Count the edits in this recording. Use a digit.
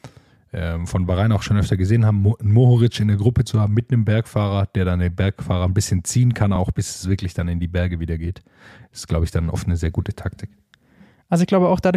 0